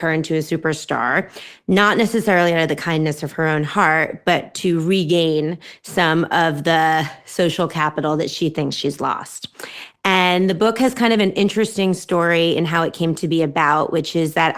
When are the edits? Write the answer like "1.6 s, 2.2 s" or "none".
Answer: none